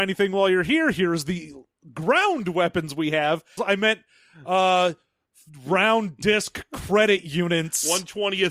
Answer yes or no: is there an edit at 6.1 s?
no